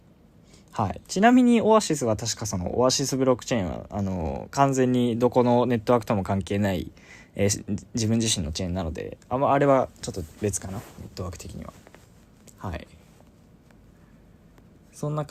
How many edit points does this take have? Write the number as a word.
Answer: one